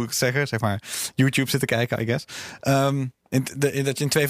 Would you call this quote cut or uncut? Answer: cut